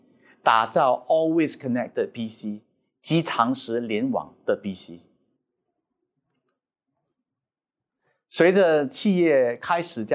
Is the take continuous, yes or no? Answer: yes